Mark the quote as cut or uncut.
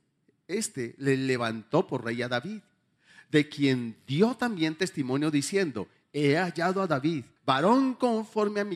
cut